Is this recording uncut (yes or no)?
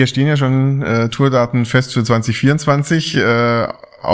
yes